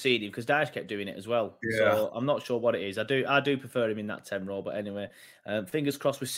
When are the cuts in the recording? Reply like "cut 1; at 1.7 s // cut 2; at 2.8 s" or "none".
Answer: none